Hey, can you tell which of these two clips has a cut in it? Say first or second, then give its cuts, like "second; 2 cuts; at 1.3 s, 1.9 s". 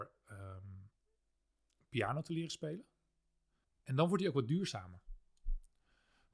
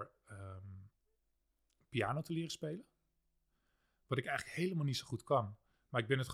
first; 1 cut; at 3.6 s